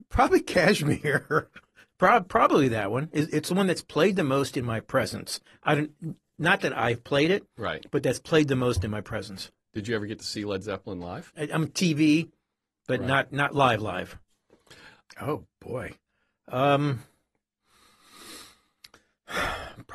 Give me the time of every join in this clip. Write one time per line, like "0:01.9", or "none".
0:11.3
0:15.1